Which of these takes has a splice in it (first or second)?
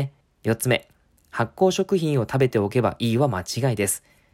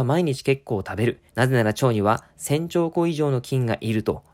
second